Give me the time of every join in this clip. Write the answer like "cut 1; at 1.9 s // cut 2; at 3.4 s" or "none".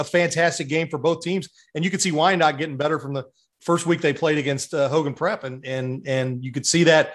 none